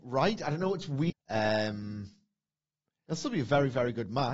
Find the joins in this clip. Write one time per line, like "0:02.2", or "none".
0:01.1

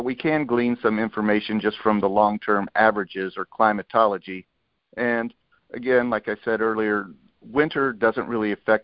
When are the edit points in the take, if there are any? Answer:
none

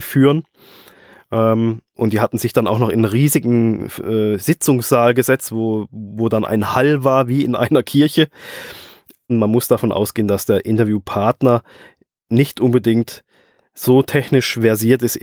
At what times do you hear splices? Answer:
0:09.3

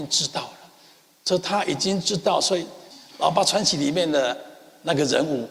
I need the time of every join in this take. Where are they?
0:02.9

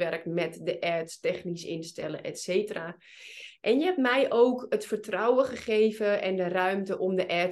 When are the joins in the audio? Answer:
none

